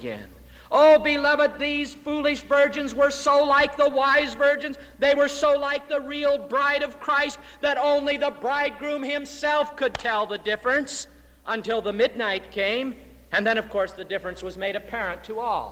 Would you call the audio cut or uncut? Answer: uncut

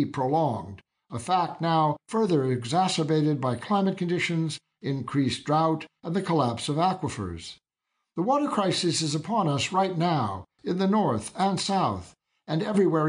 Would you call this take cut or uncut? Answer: cut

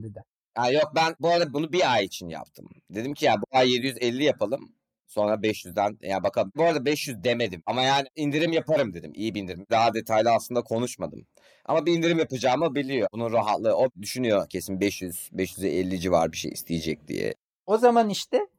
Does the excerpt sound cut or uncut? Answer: uncut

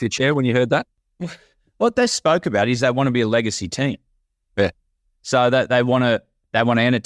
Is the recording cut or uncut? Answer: uncut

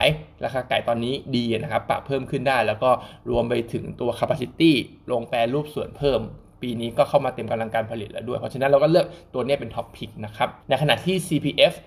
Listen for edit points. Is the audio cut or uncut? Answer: cut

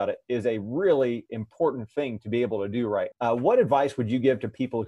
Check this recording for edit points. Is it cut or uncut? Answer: cut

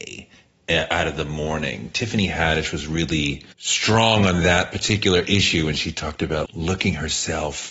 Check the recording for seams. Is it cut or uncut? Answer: cut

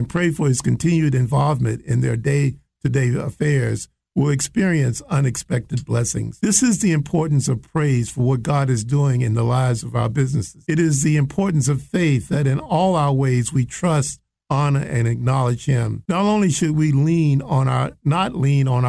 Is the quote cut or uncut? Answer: uncut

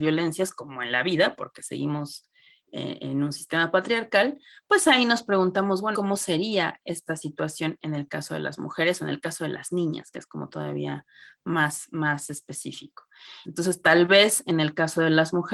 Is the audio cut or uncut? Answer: cut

